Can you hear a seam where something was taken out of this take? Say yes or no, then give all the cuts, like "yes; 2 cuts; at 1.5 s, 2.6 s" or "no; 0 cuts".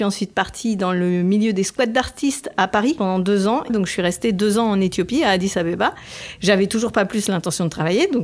yes; 1 cut; at 3.7 s